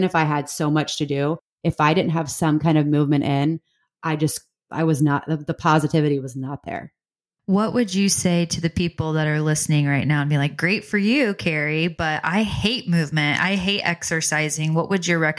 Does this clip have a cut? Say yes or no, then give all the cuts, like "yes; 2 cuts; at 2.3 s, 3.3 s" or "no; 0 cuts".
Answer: no; 0 cuts